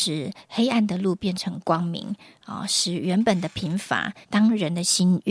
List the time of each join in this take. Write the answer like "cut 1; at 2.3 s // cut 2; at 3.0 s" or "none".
cut 1; at 4.2 s